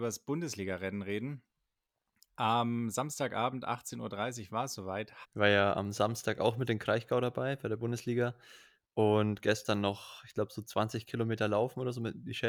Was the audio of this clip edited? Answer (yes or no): yes